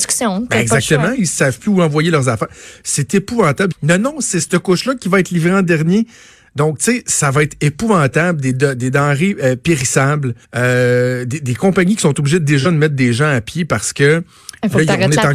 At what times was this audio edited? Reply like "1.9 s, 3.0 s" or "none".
3.7 s, 10.4 s